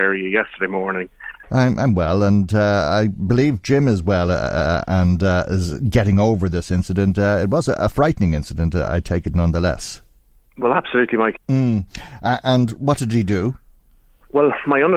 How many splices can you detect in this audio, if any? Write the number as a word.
two